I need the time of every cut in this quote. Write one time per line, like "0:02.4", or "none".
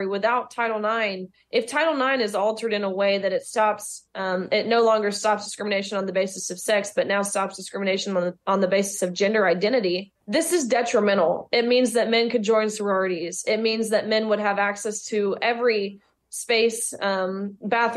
0:10.2